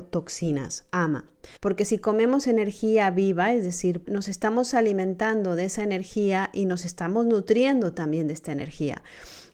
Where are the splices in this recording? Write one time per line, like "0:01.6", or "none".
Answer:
0:01.6
0:04.0